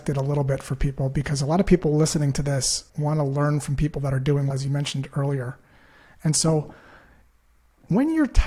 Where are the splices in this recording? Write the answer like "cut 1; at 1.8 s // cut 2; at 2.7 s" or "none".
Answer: cut 1; at 2.9 s // cut 2; at 4.5 s